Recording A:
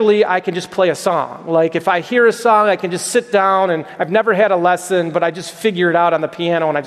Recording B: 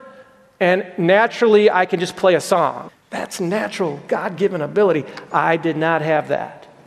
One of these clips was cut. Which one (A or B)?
B